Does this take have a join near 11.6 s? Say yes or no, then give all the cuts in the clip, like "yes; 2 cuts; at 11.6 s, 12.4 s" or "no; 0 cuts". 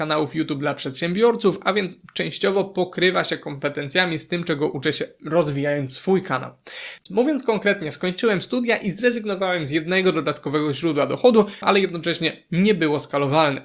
yes; 2 cuts; at 7.0 s, 11.6 s